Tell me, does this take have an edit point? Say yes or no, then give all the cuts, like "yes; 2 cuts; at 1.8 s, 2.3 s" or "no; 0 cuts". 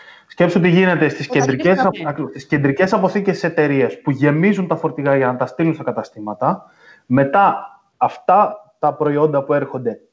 yes; 1 cut; at 1.9 s